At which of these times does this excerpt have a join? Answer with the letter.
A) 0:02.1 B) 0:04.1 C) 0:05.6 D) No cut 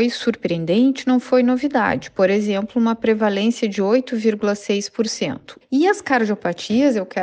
C